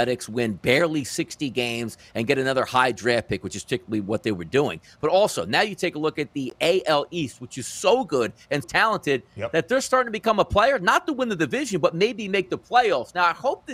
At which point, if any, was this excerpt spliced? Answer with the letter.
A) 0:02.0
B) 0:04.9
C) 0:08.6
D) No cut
C